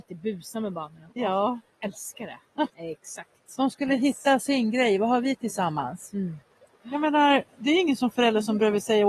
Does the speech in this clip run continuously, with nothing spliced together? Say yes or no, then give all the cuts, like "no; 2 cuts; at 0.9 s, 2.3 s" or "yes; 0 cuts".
no; 2 cuts; at 2.7 s, 6.7 s